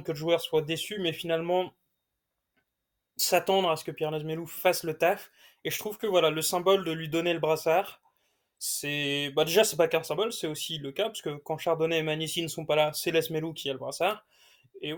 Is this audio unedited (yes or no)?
yes